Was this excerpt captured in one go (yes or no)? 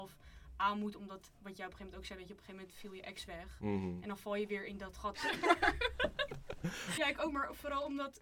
no